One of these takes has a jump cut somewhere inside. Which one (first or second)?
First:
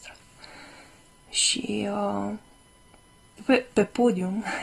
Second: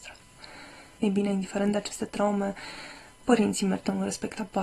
second